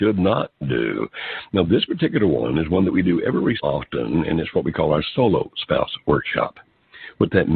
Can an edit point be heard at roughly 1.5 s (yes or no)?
yes